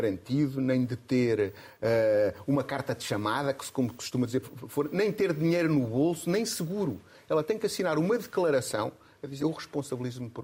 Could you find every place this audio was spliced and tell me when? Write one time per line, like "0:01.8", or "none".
0:04.4
0:09.4